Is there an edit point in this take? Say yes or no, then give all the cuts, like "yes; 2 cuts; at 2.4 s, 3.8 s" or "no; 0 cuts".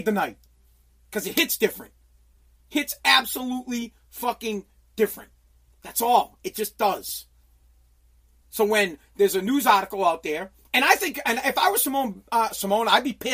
no; 0 cuts